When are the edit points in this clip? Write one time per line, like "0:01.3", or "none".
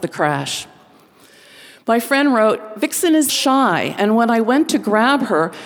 0:03.3